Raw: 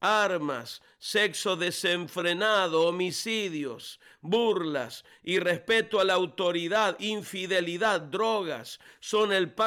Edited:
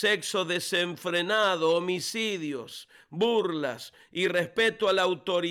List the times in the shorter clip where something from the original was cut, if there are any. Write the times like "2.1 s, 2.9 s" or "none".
none